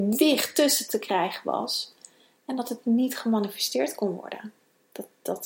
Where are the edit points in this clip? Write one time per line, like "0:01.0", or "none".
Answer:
none